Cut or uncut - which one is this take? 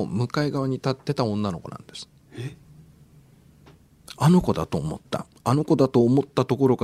uncut